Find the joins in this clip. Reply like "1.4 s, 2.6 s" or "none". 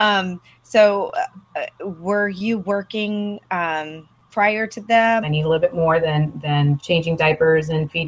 5.2 s, 6.8 s